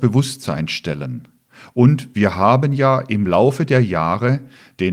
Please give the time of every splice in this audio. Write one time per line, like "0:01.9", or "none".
none